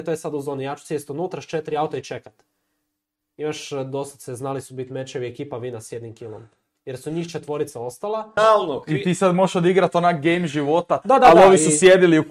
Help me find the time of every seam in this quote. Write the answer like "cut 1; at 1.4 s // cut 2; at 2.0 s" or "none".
cut 1; at 8.4 s // cut 2; at 11.0 s